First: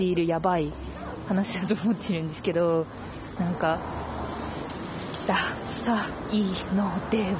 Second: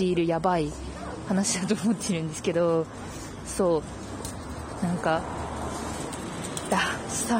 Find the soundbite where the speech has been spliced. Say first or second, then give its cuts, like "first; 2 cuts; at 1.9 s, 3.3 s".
first; 1 cut; at 3.4 s